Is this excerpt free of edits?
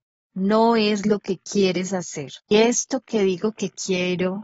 no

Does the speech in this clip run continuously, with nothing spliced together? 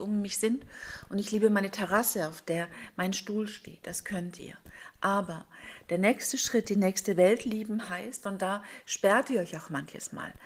yes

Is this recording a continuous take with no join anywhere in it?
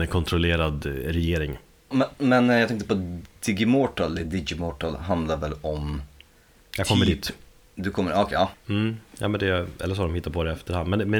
no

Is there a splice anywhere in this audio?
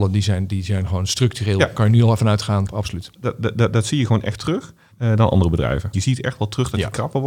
yes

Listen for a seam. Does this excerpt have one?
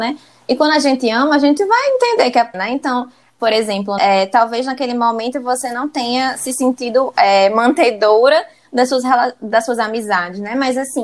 yes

